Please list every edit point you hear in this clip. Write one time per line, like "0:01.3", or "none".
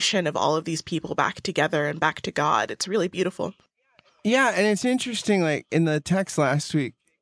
none